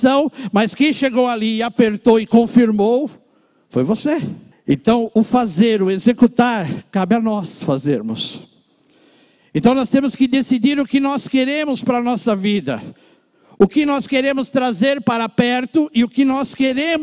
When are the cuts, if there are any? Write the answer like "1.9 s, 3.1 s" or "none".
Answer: 4.5 s